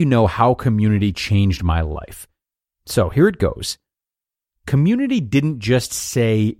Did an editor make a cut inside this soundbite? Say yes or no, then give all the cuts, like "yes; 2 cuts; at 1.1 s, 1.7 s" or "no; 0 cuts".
no; 0 cuts